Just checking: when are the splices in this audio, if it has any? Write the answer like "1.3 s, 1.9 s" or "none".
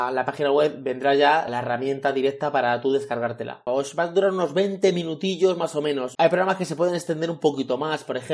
1.5 s, 3.7 s, 6.1 s